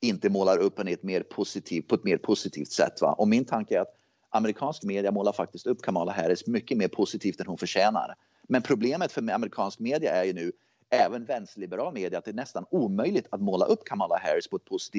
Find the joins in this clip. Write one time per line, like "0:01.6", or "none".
none